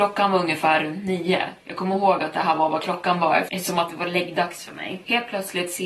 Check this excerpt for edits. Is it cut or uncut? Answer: cut